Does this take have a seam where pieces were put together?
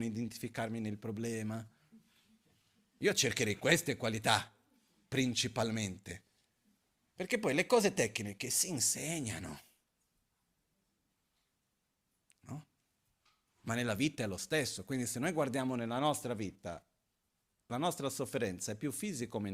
no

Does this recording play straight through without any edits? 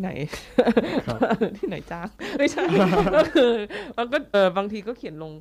no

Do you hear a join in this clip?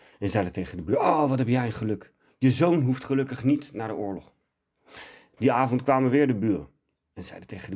yes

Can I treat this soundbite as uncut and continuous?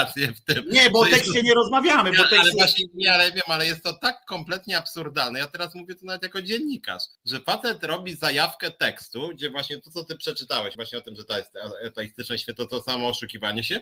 no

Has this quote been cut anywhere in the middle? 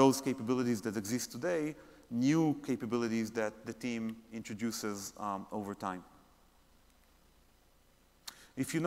no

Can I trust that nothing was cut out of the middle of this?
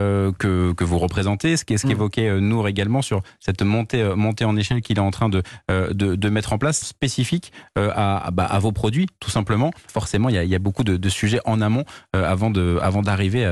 no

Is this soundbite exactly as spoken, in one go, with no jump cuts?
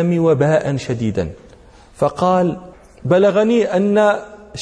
yes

